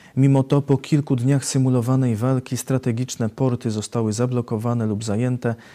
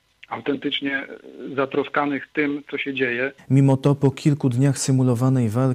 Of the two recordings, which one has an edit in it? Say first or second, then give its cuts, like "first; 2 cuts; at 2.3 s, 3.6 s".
second; 1 cut; at 3.4 s